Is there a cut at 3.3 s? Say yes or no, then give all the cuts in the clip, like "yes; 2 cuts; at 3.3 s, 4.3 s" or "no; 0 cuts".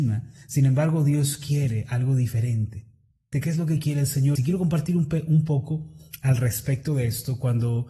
yes; 2 cuts; at 3.3 s, 4.4 s